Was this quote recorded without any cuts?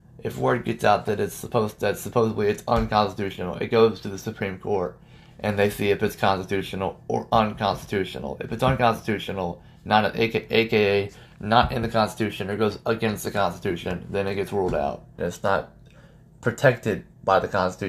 no; 1 cut; at 15.2 s

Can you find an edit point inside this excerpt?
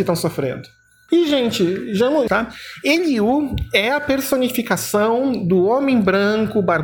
yes; 2 cuts; at 1.1 s, 2.3 s

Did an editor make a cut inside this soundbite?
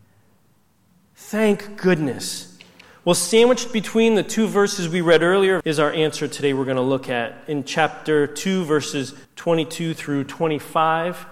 yes; 2 cuts; at 5.6 s, 9.2 s

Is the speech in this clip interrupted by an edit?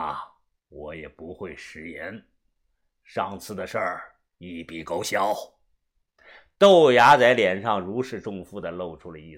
no; 0 cuts

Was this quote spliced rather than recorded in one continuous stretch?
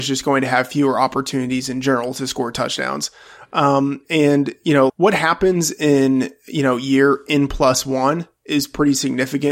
yes; 1 cut; at 4.9 s

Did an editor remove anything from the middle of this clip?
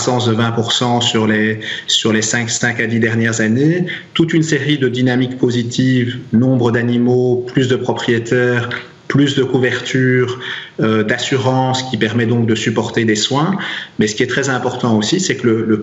no; 0 cuts

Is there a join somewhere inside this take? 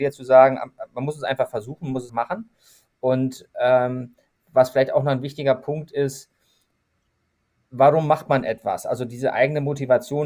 yes; 1 cut; at 2.1 s

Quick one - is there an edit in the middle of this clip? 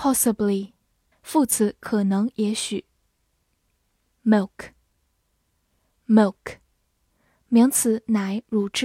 yes; 1 cut; at 1.1 s

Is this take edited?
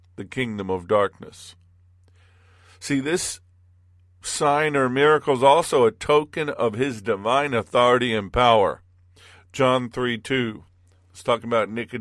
no; 0 cuts

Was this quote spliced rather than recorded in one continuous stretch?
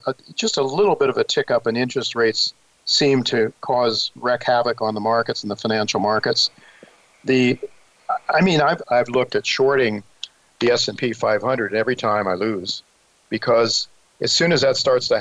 yes; 1 cut; at 8.8 s

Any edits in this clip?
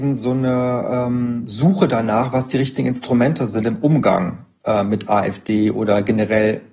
no; 0 cuts

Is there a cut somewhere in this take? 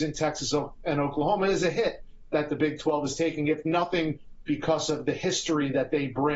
yes; 1 cut; at 4.5 s

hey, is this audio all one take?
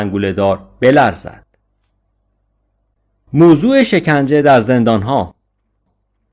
yes; 0 cuts

